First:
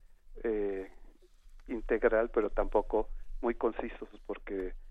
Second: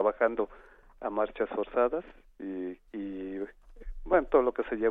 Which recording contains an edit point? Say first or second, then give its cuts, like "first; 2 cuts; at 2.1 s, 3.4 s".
second; 1 cut; at 2.9 s